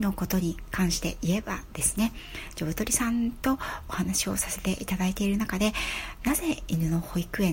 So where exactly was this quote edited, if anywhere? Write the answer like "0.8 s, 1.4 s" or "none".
none